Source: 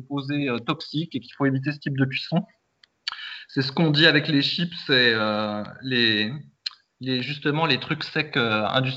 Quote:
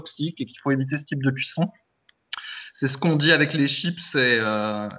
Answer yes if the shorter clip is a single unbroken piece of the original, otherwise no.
yes